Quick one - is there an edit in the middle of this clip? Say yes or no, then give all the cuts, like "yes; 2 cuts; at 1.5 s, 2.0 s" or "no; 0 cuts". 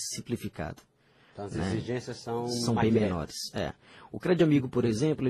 no; 0 cuts